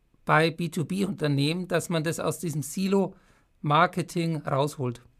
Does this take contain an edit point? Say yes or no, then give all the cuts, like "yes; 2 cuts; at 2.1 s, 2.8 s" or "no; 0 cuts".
no; 0 cuts